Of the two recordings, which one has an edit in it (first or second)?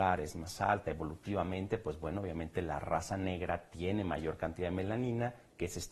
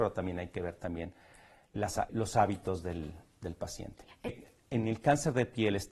second